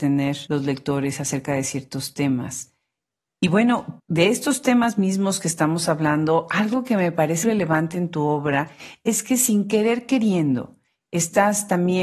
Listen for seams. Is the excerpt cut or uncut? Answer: cut